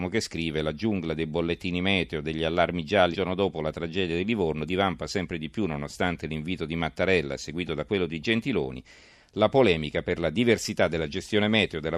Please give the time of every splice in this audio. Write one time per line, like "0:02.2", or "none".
0:03.1